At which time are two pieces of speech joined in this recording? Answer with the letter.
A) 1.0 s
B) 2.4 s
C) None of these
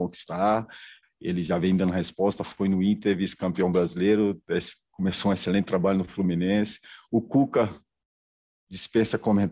A